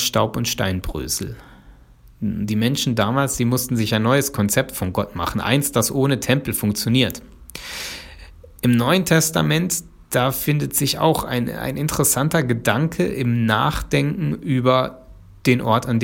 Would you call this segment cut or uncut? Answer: uncut